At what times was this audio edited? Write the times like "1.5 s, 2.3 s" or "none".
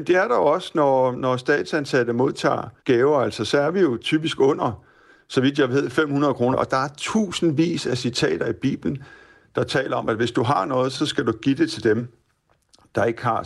2.8 s, 6.5 s